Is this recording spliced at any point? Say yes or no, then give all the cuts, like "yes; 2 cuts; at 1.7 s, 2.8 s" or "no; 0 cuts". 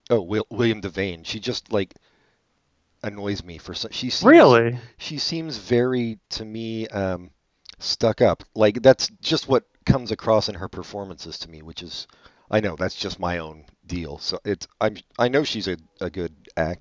no; 0 cuts